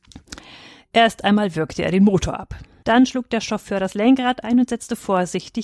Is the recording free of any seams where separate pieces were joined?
no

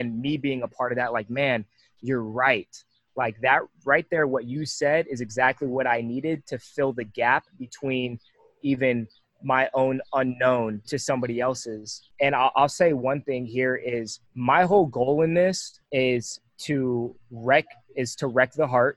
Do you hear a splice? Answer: yes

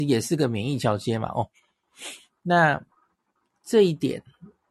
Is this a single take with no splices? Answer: yes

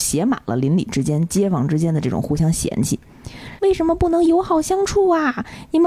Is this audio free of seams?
no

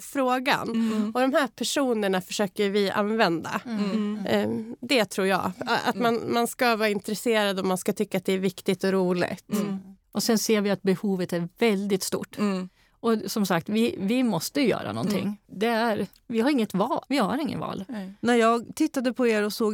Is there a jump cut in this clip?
yes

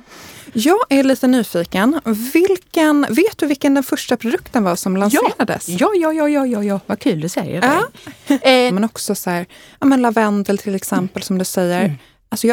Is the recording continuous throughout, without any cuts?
no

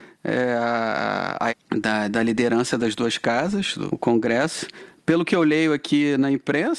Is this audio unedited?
no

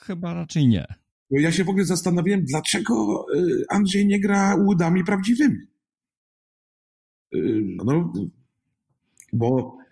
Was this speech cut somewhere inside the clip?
yes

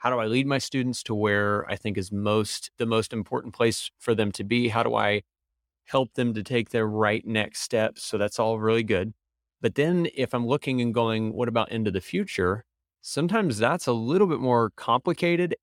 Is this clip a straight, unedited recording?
yes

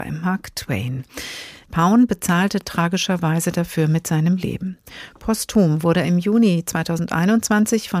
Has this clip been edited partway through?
yes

